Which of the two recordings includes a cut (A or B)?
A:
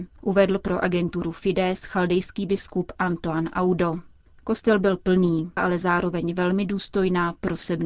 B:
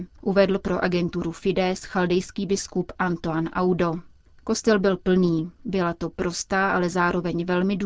A